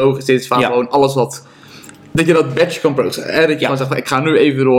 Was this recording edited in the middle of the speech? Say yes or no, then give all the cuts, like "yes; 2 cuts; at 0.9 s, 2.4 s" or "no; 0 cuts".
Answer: no; 0 cuts